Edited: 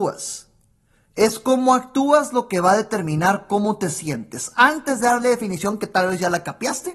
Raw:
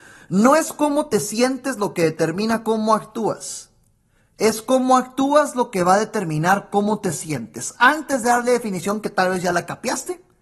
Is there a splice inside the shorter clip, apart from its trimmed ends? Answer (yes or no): no